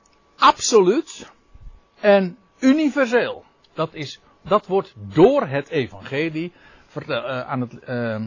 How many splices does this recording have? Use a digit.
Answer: 1